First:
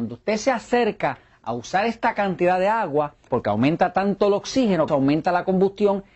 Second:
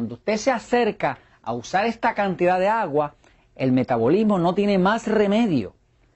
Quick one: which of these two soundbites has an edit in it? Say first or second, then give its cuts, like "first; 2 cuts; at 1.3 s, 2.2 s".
first; 2 cuts; at 3.3 s, 4.9 s